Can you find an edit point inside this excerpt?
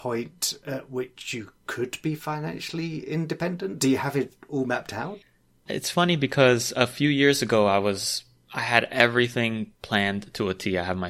no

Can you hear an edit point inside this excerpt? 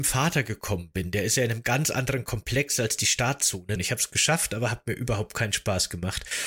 yes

